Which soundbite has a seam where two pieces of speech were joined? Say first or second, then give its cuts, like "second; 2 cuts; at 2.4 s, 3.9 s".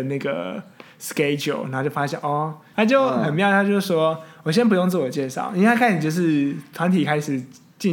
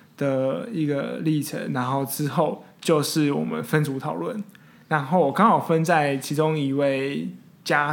first; 1 cut; at 2.7 s